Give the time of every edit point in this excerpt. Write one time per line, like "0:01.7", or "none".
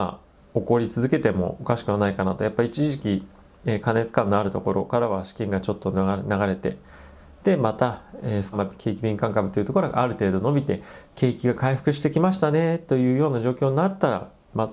0:08.5